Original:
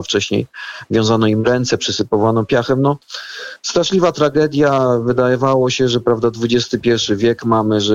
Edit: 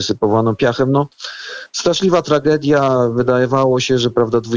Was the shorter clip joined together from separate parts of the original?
no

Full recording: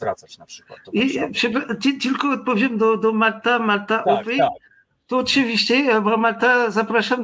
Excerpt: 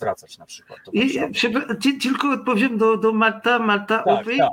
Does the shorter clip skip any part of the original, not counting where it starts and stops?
no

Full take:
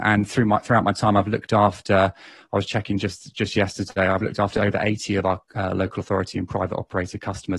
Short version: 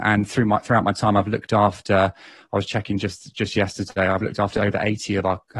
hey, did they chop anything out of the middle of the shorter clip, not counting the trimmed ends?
no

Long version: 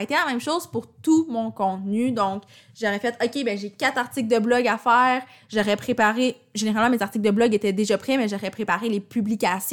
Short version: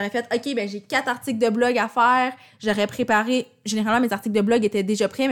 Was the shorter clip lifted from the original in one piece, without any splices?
yes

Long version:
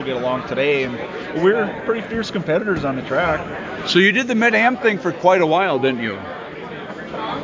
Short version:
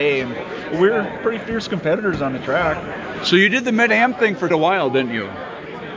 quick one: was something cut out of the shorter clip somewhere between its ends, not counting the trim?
yes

